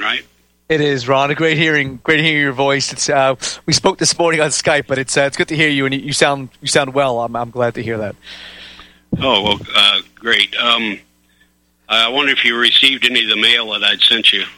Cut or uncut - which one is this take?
uncut